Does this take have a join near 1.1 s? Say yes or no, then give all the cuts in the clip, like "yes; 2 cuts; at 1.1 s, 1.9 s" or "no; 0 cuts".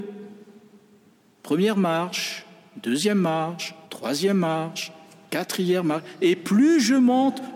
no; 1 cut; at 3.8 s